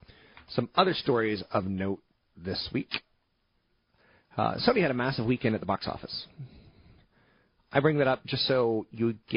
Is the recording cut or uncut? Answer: uncut